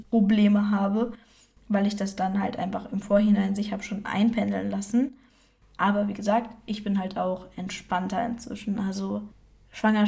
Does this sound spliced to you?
yes; 1 cut; at 5.6 s

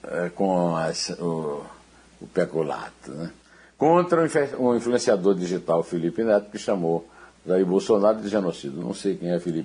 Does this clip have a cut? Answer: no; 0 cuts

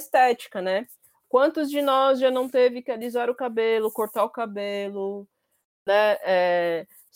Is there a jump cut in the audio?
no; 0 cuts

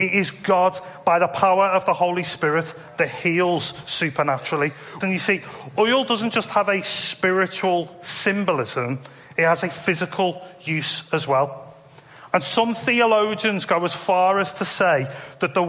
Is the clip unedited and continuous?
no; 1 cut; at 5.0 s

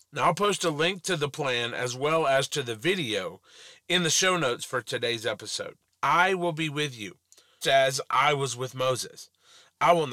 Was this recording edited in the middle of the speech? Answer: yes; 2 cuts; at 5.9 s, 7.6 s

